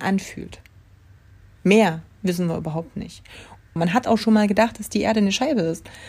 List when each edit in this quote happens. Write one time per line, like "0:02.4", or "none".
0:03.8